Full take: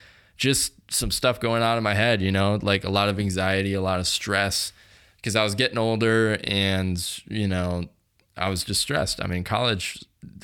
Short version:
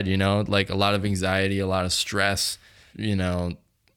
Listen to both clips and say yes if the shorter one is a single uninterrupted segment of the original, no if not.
no